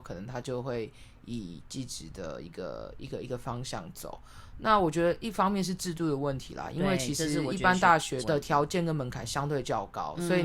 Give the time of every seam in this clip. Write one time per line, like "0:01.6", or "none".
0:08.2